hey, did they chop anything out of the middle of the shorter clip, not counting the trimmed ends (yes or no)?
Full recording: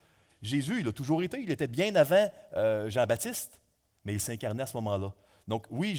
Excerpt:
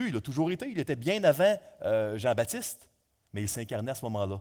no